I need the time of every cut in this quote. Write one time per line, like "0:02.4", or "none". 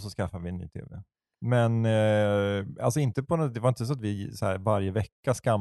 none